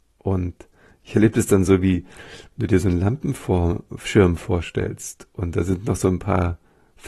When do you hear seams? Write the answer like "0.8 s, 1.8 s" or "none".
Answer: none